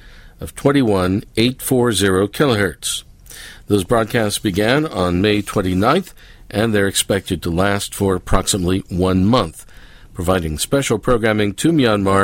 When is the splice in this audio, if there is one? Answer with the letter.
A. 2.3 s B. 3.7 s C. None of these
C